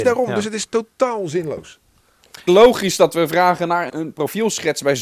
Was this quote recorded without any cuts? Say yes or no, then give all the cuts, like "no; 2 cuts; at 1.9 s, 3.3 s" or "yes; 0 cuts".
no; 2 cuts; at 2.5 s, 3.9 s